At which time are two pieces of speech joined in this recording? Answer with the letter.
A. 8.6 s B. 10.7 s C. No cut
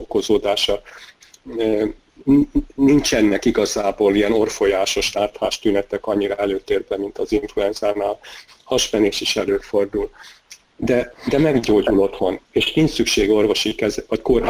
C